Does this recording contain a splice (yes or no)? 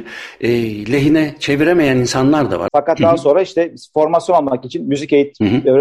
yes